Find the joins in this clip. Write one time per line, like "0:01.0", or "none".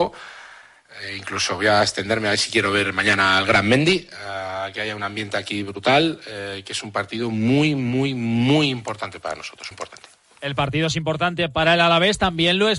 0:09.7